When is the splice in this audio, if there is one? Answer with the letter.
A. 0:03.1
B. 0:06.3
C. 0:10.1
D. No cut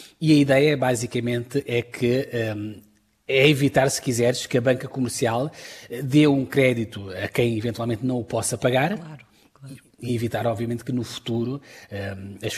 C